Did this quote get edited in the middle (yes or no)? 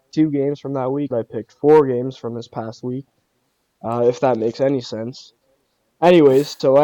yes